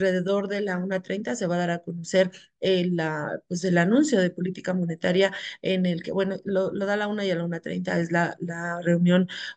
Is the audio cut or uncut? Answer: uncut